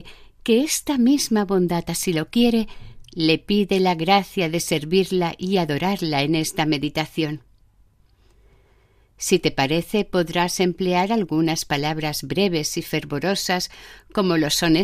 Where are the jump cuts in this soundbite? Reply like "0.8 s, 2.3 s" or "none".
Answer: none